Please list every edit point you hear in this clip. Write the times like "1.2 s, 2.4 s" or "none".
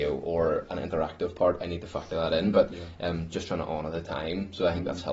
none